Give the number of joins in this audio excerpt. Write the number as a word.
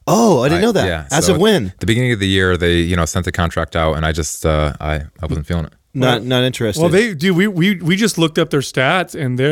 zero